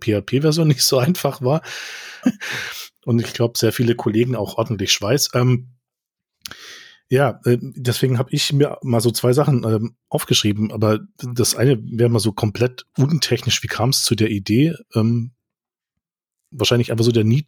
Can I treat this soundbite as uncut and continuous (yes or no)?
no